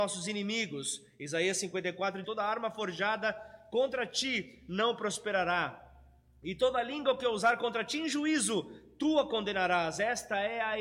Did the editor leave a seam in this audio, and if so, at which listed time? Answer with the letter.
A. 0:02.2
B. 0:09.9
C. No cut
A